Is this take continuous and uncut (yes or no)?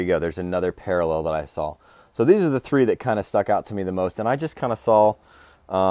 yes